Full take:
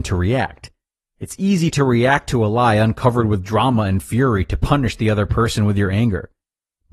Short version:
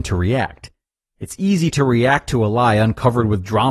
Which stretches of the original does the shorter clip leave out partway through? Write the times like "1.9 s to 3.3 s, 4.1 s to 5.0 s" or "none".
none